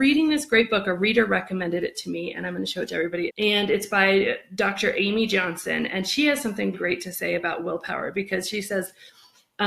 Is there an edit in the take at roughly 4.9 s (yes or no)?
no